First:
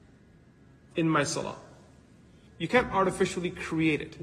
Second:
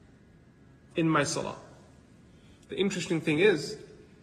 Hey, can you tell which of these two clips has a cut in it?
first; 1 cut; at 2.5 s

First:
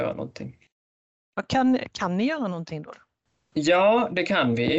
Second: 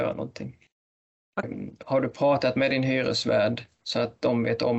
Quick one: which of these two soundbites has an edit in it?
second; 1 cut; at 1.4 s

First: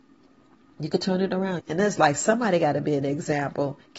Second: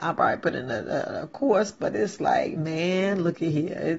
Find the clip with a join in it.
first; 1 cut; at 1.6 s

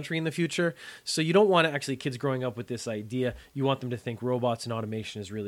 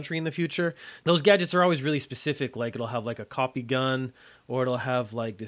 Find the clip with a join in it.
second; 1 cut; at 1.0 s

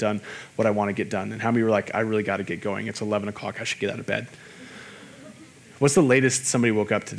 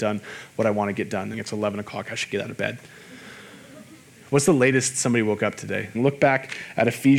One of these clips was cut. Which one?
second; 2 cuts; at 1.3 s, 5.9 s

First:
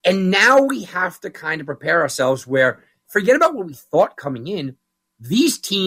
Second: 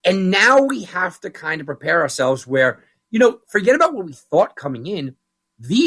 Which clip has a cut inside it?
first; 1 cut; at 3.0 s

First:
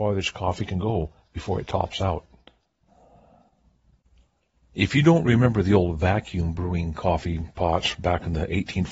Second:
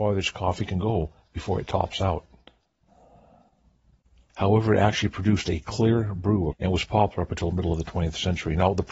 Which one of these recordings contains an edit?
second; 2 cuts; at 4.3 s, 6.5 s

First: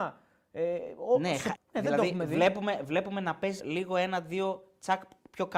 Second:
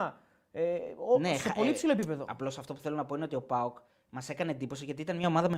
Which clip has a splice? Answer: first; 2 cuts; at 1.5 s, 3.6 s

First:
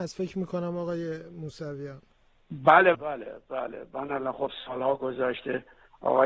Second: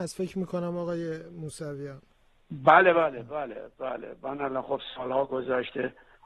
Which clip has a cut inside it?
first; 1 cut; at 2.9 s

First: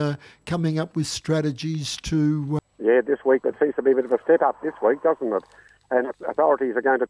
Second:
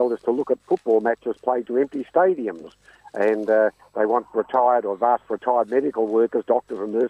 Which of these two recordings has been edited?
first; 1 cut; at 2.6 s

